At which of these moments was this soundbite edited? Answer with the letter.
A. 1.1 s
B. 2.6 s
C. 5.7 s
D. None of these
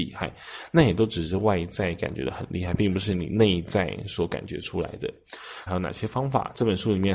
C